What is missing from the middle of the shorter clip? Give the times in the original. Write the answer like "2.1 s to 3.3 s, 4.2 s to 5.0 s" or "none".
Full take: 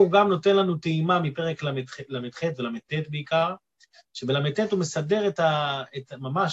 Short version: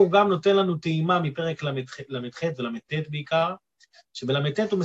none